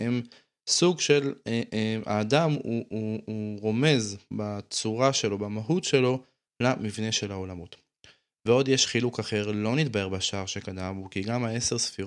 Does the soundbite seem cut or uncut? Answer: uncut